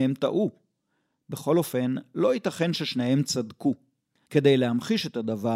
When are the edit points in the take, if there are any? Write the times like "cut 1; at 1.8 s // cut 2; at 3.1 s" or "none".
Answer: cut 1; at 4.3 s